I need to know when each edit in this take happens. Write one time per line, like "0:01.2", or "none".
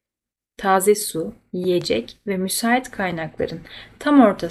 none